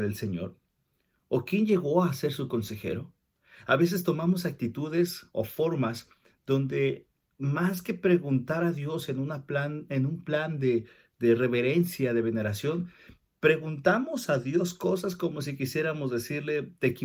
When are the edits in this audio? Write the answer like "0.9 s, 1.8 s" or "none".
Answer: none